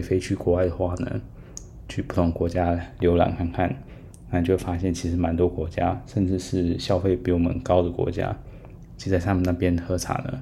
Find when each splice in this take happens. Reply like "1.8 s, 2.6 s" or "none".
none